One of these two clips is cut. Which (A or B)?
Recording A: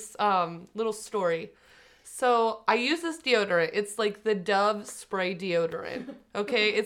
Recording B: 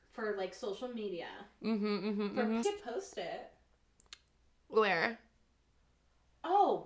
B